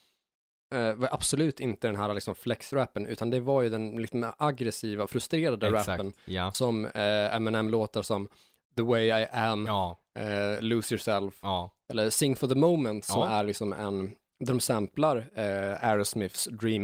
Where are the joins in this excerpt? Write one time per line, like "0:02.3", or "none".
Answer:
none